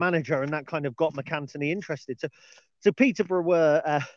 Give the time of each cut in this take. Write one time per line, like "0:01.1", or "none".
none